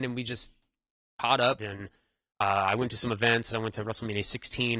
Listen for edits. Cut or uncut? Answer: cut